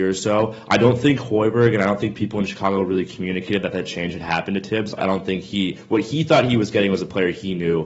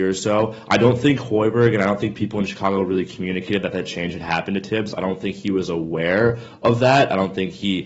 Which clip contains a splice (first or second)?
first